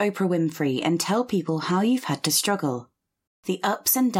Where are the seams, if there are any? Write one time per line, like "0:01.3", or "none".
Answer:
0:03.3